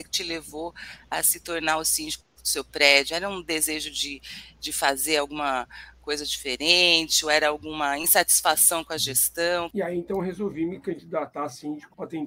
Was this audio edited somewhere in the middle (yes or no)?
yes